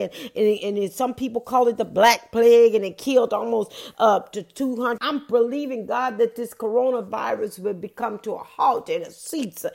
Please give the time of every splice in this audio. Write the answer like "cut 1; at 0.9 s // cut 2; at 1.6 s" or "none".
cut 1; at 5.0 s